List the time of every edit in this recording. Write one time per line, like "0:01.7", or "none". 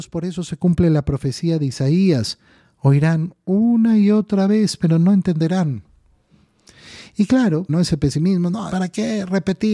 0:07.7
0:08.7